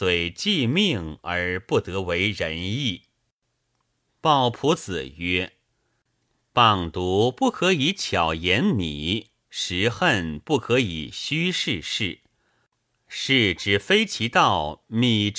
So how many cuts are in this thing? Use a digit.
0